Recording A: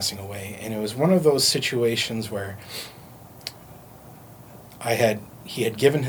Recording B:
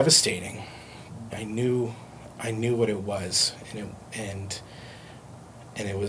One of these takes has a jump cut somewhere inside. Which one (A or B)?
B